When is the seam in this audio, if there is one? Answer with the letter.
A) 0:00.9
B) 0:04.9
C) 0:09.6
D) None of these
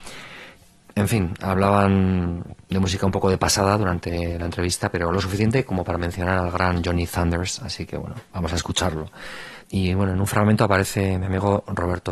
C